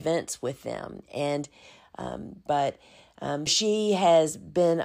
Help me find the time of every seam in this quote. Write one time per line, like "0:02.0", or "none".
0:02.5
0:03.5

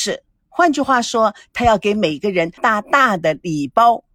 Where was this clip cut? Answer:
0:02.6

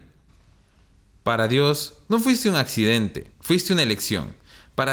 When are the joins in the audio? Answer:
0:03.3

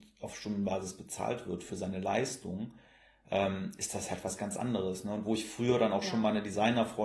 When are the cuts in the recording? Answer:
none

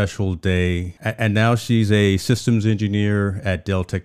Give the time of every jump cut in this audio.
0:01.0

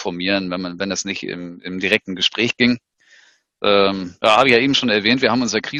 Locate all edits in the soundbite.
none

